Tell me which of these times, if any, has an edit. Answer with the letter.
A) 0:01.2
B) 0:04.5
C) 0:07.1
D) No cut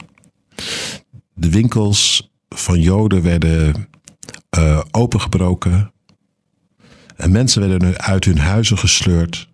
B